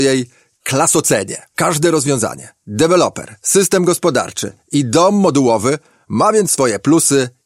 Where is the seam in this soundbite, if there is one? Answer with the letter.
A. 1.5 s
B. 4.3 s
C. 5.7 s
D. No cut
A